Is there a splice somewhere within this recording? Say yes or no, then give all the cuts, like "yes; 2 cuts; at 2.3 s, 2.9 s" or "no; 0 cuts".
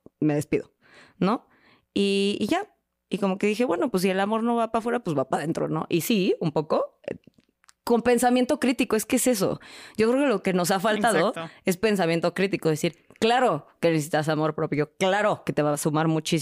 no; 0 cuts